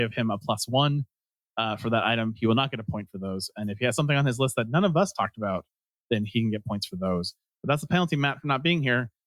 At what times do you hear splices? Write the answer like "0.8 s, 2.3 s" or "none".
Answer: none